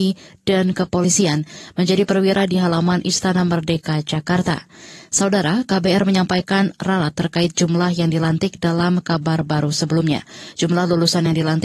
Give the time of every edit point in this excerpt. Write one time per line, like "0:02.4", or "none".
none

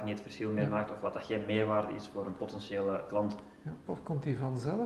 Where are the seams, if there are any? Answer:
0:03.9

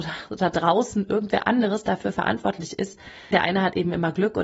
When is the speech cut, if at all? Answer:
0:03.3

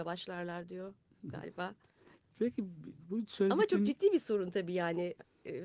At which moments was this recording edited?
none

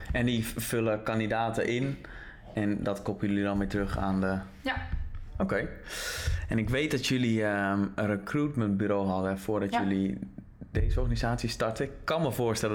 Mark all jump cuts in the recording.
none

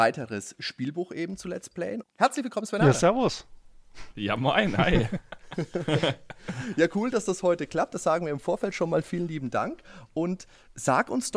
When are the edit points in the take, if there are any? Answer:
0:02.0

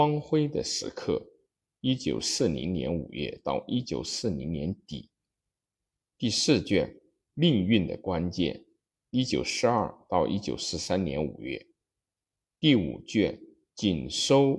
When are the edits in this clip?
0:06.1

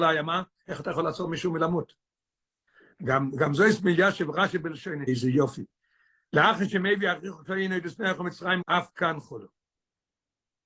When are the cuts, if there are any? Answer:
0:05.1
0:08.6

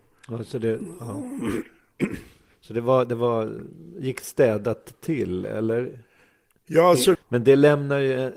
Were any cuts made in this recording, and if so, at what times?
0:07.2

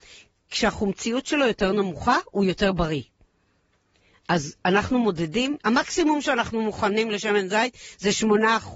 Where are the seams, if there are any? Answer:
0:05.6

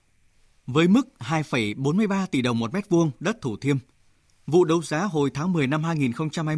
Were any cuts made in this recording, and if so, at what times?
none

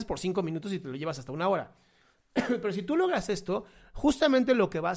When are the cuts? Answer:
none

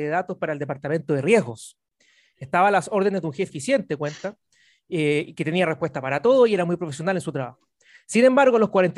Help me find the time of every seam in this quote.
0:03.5

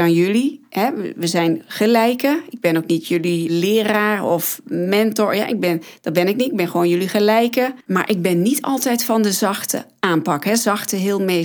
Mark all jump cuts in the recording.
0:07.8

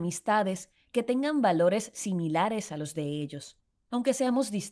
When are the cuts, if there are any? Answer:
none

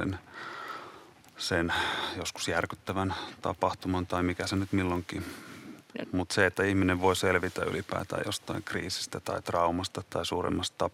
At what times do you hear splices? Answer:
0:06.0
0:10.0

